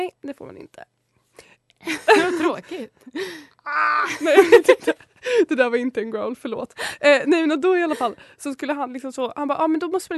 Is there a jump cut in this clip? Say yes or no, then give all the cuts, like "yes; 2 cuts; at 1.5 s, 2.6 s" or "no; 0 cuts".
no; 0 cuts